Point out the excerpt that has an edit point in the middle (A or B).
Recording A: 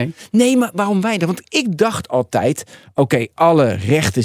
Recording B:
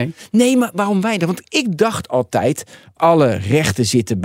B